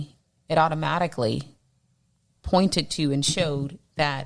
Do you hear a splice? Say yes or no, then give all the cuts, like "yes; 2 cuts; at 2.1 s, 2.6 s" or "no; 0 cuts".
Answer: no; 0 cuts